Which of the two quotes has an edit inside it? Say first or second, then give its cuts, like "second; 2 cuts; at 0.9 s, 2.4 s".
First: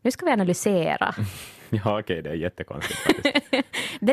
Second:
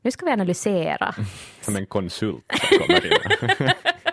second; 1 cut; at 1.6 s